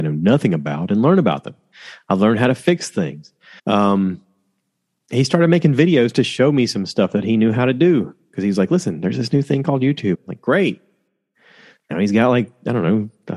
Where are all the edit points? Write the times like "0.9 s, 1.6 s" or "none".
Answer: 3.6 s, 10.1 s